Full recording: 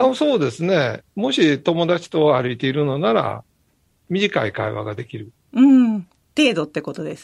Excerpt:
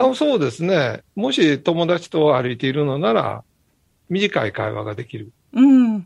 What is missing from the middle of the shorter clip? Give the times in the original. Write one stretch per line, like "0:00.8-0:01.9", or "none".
none

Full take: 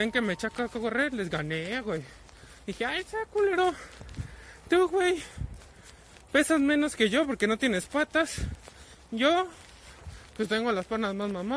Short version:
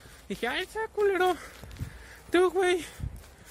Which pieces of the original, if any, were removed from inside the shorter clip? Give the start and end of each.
none

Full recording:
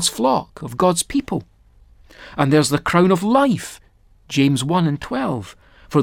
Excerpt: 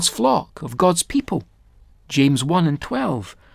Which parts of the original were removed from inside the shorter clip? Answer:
0:01.9-0:04.1

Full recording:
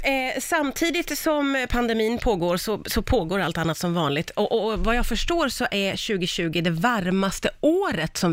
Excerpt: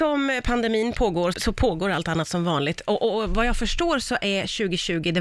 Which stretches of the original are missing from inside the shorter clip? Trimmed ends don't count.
0:02.6-0:02.8

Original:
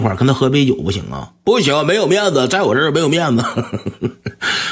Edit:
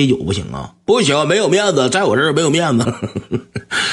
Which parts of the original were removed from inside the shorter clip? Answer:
0:03.4-0:03.5

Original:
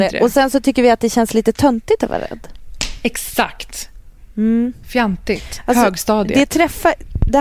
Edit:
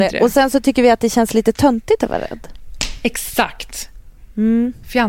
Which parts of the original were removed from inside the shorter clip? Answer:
none

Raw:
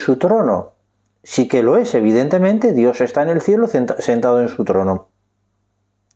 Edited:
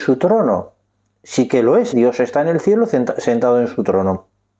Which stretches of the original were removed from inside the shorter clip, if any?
0:01.9-0:02.7

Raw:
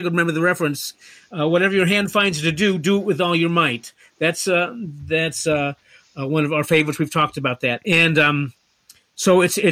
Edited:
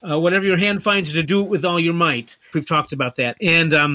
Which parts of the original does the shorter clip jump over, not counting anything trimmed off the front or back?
0:02.5-0:02.8
0:04.1-0:07.0

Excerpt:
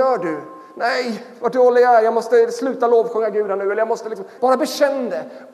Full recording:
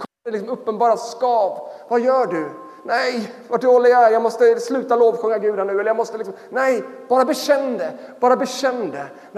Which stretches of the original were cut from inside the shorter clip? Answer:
0:06.5-0:07.1

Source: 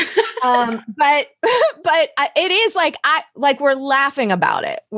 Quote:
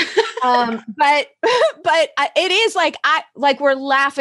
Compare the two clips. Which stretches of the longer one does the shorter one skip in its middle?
none

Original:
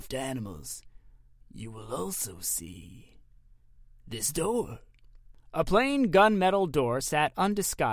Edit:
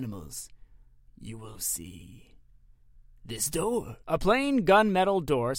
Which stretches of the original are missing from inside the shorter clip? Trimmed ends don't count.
0:01.9-0:02.4
0:04.8-0:05.5

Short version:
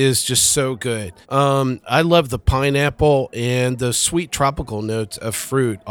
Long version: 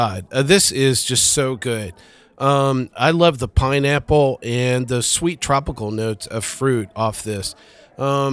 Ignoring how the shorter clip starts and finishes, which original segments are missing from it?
0:02.0-0:02.3

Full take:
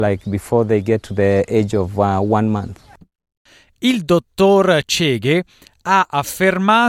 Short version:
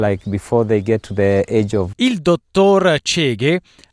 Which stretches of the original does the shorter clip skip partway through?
0:01.9-0:03.8

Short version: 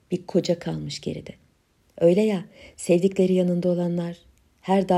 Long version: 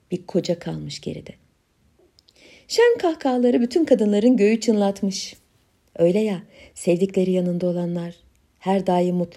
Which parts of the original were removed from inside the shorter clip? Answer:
0:01.8-0:05.8

